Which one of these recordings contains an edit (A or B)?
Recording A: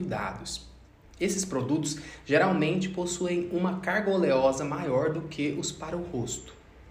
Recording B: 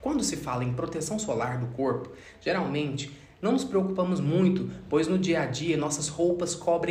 A